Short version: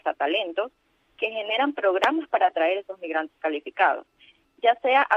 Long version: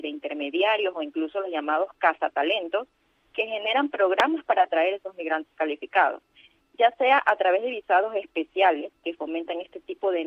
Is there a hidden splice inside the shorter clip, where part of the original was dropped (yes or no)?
no